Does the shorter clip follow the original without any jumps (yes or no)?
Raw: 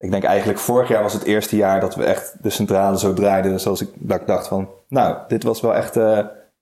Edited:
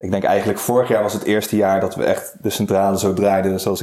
yes